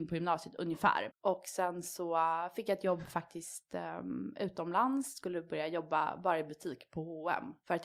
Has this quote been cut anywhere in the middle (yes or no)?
yes